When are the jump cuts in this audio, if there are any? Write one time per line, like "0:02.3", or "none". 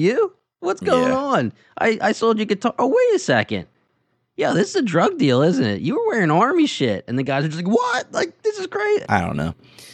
0:09.0